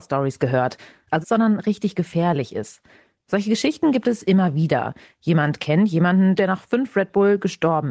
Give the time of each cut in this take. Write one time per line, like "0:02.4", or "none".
0:01.2
0:06.4